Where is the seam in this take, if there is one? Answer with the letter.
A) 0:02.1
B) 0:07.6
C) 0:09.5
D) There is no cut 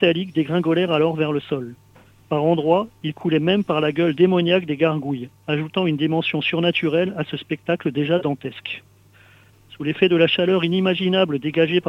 C